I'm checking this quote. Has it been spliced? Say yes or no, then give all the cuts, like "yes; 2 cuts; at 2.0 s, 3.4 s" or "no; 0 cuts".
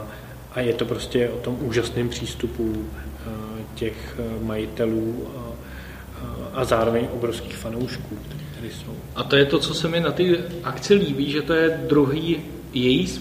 no; 0 cuts